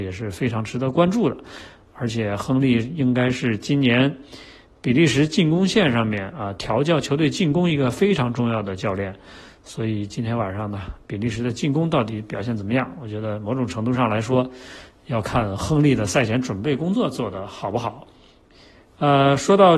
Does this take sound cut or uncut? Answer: uncut